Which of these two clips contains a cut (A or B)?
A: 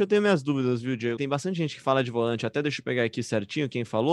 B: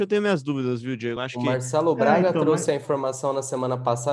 A